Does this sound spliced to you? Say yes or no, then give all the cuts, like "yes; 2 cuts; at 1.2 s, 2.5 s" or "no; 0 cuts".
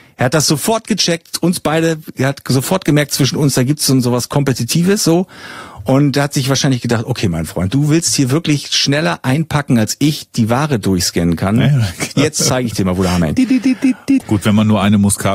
yes; 2 cuts; at 12.1 s, 14.2 s